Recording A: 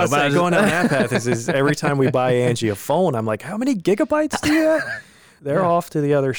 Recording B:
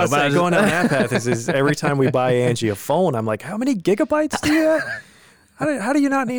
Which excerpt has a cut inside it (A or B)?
A